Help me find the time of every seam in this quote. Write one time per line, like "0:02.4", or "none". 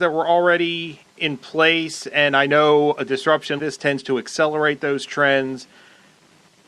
0:01.1
0:03.6